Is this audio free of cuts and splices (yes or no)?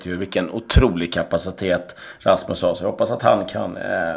yes